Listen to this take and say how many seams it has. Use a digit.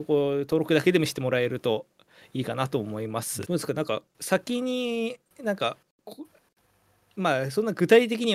1